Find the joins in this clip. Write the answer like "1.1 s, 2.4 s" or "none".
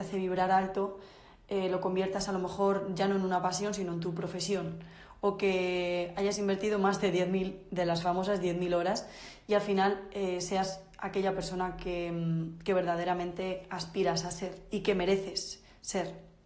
none